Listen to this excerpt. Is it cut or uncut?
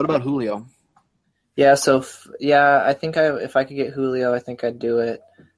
uncut